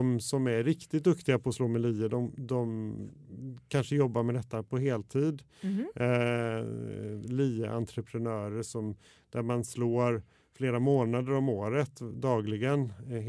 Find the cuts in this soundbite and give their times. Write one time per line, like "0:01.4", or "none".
none